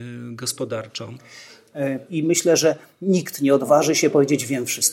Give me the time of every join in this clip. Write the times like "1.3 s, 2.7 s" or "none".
2.1 s